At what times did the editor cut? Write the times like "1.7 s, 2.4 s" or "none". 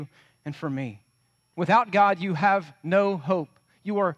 1.5 s